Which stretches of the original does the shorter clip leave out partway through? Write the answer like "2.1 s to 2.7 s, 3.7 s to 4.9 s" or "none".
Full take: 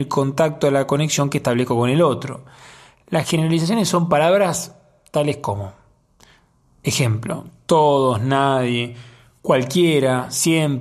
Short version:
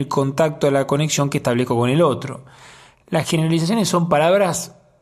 none